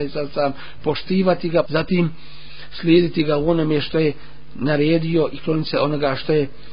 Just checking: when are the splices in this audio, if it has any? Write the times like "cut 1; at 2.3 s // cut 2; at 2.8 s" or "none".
cut 1; at 1.6 s